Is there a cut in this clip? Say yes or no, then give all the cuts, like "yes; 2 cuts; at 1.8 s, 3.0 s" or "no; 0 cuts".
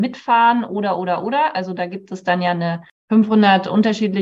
no; 0 cuts